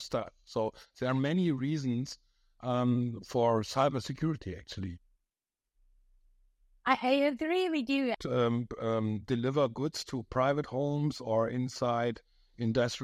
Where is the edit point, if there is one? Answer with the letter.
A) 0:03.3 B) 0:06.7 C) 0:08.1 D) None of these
C